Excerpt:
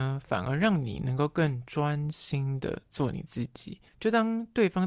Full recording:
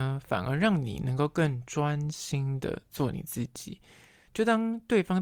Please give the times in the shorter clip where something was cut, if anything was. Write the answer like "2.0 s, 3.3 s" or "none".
3.9 s